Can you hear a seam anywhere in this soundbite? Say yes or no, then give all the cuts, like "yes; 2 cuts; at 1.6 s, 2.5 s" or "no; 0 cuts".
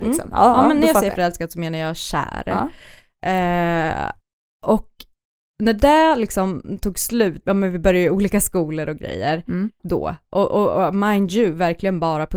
yes; 2 cuts; at 7.4 s, 9.8 s